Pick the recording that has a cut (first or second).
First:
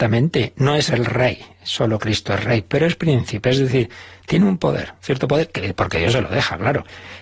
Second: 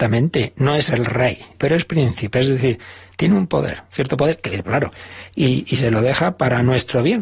second